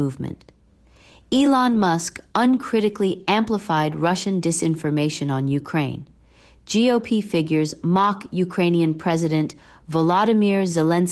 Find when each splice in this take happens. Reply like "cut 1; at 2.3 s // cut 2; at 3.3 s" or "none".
none